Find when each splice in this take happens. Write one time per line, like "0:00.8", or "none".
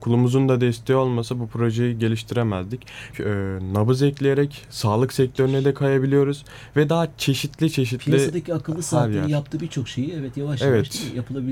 0:03.1